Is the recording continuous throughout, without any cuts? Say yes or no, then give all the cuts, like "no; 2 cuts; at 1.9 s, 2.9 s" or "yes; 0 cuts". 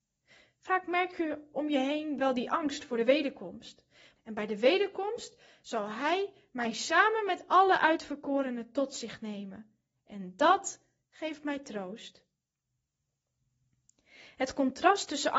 no; 1 cut; at 4.2 s